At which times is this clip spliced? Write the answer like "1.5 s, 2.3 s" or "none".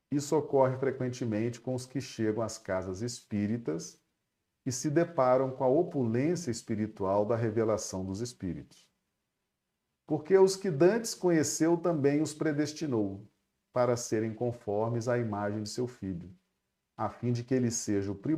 9.9 s